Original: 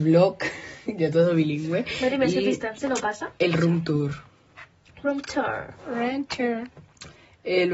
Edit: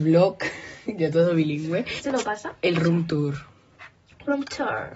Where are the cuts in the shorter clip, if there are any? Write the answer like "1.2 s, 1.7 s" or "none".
2.0 s